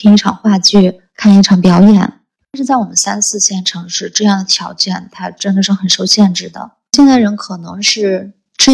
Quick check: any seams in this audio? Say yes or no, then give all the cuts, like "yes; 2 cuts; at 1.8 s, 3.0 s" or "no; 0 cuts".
no; 0 cuts